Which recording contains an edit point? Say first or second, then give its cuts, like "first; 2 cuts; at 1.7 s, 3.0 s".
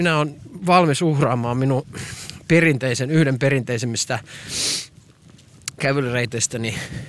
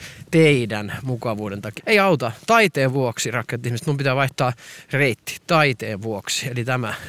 second; 1 cut; at 1.8 s